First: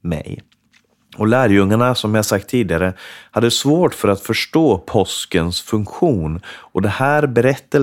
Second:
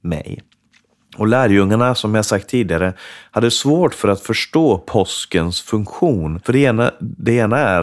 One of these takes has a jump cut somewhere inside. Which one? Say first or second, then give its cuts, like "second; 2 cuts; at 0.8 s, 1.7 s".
second; 1 cut; at 6.4 s